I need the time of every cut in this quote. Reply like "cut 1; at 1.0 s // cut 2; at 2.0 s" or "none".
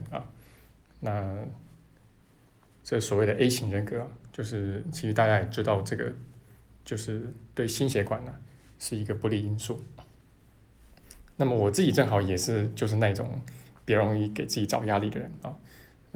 none